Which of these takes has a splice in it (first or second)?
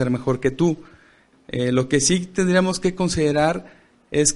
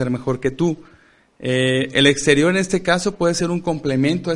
first